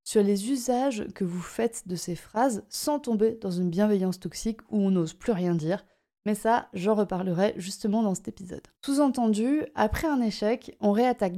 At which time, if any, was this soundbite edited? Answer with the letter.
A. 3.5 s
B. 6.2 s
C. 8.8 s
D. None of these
C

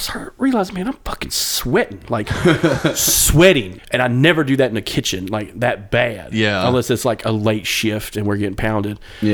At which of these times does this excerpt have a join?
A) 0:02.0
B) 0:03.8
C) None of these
B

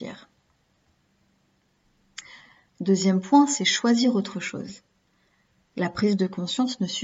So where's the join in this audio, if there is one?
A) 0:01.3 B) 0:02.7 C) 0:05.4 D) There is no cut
B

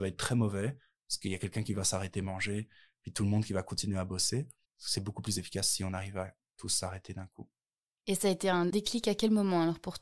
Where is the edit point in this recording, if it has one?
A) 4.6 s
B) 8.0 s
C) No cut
A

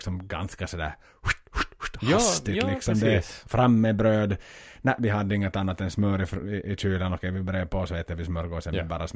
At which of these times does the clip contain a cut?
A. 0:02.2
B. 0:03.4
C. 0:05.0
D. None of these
D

